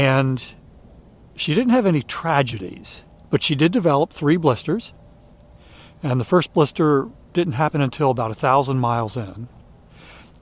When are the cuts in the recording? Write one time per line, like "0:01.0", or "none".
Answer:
0:03.2